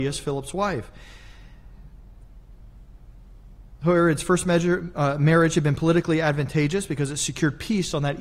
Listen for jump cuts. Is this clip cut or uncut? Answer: uncut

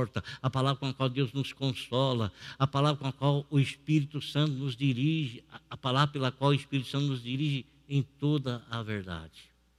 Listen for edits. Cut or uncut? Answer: uncut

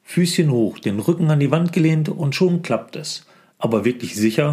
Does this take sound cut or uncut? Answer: cut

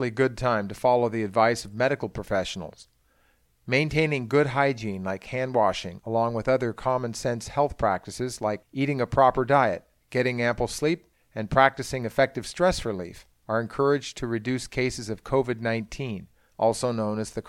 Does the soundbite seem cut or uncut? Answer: uncut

